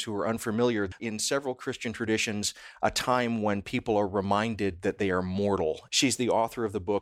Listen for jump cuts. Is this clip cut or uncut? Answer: cut